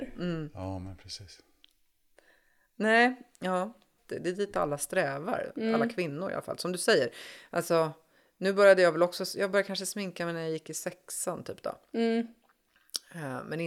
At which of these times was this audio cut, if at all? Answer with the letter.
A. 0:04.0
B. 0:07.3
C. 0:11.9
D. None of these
A